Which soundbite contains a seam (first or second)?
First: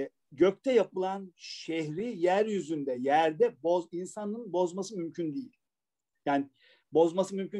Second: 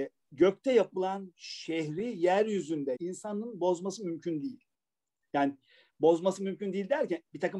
second